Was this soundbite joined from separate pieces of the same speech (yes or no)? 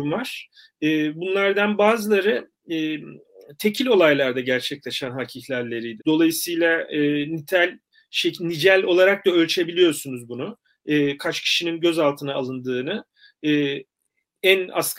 yes